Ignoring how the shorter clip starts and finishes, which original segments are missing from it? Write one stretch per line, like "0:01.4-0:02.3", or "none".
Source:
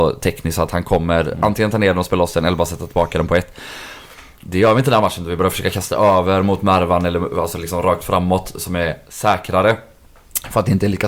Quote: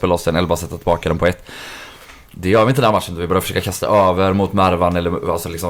none